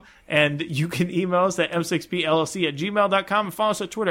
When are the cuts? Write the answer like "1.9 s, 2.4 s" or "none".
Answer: none